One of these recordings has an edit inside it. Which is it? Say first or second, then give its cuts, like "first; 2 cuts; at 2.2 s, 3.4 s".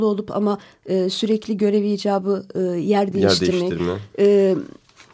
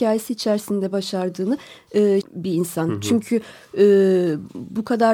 second; 1 cut; at 2.2 s